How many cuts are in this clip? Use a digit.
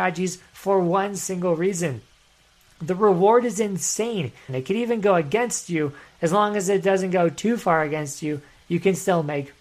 1